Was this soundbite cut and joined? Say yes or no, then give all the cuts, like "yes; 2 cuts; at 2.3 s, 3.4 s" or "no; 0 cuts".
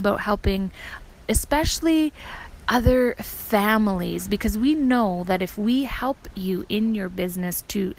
yes; 1 cut; at 1.3 s